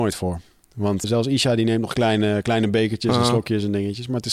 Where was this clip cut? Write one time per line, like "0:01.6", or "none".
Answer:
0:01.0